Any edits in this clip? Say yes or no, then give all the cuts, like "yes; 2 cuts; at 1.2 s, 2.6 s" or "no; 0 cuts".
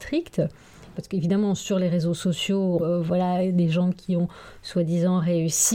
yes; 2 cuts; at 1.0 s, 2.8 s